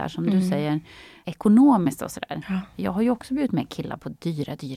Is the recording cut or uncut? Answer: cut